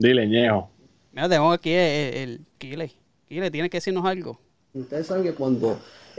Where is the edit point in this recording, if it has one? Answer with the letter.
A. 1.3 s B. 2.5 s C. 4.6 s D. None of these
B